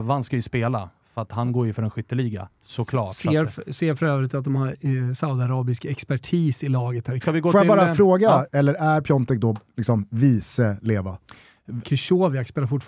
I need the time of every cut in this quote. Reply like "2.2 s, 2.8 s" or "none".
7.2 s, 8.5 s, 11.8 s